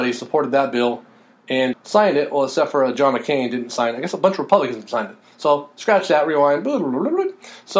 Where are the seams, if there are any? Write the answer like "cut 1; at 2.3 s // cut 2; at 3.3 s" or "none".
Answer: cut 1; at 1.7 s

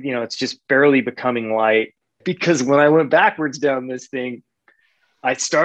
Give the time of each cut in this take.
cut 1; at 2.2 s

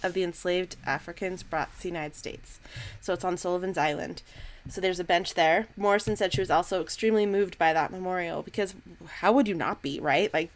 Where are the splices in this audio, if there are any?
none

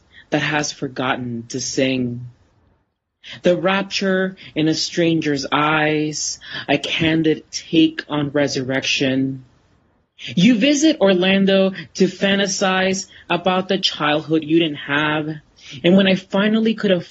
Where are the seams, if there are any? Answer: cut 1; at 15.8 s

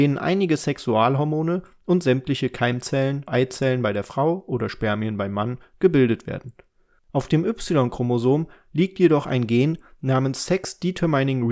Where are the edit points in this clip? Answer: cut 1; at 3.3 s // cut 2; at 7.0 s

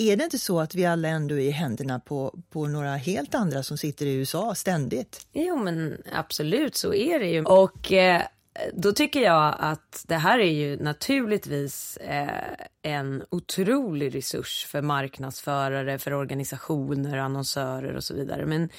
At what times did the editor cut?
cut 1; at 7.4 s

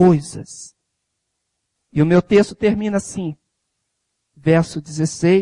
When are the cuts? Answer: cut 1; at 1.8 s

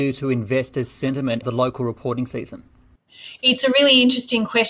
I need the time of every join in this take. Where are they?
cut 1; at 1.4 s

